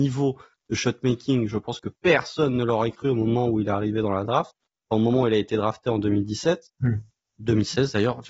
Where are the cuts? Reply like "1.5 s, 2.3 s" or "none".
none